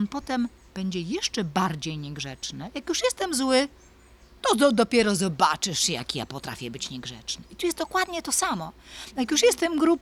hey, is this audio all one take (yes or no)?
yes